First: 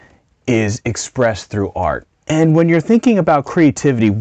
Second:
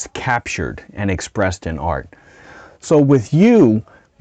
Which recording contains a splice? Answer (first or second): first